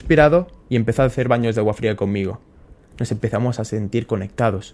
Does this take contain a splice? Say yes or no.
yes